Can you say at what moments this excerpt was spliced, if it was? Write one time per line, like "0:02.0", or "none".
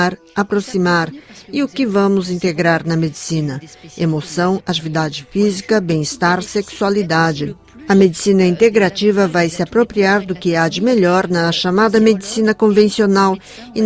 none